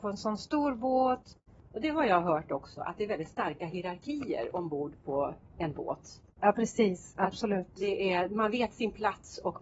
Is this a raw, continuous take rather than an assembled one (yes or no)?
no